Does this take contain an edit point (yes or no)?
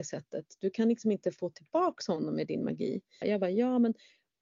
yes